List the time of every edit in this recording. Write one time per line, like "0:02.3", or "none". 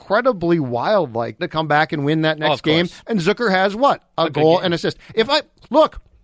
0:01.4